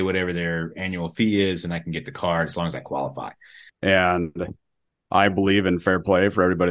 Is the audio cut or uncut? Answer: cut